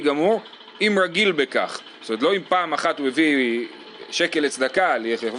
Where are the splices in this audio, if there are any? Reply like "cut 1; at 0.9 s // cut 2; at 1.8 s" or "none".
none